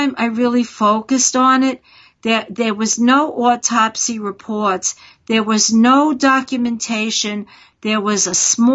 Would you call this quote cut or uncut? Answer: uncut